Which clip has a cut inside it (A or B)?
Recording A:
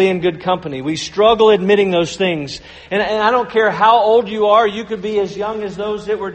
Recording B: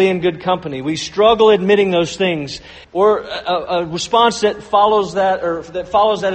B